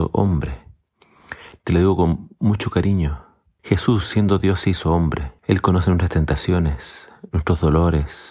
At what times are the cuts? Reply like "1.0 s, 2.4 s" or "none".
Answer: 1.6 s, 3.6 s, 5.4 s